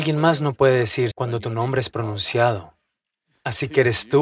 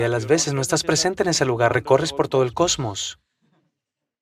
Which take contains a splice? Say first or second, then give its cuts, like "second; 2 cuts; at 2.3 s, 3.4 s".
first; 1 cut; at 1.1 s